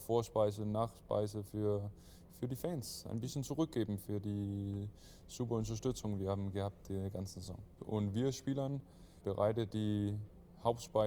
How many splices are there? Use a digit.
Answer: 2